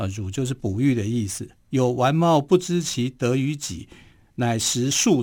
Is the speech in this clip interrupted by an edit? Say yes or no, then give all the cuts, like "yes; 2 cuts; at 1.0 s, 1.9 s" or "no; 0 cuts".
no; 0 cuts